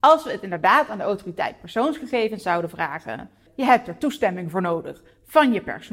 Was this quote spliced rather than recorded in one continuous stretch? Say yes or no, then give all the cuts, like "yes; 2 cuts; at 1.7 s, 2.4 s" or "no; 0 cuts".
yes; 1 cut; at 3.5 s